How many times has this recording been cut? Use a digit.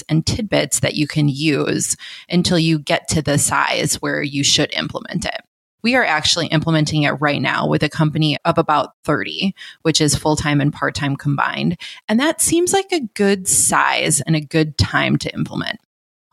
0